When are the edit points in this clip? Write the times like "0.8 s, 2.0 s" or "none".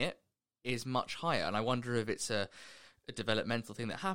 none